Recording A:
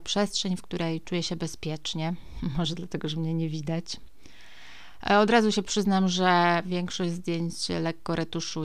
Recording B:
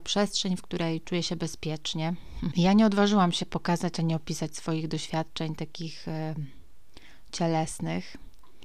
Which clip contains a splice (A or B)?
B